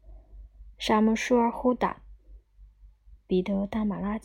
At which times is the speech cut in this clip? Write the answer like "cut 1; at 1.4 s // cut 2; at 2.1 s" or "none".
cut 1; at 2.4 s